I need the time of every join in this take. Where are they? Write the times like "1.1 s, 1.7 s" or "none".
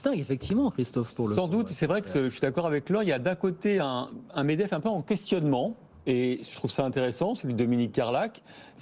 none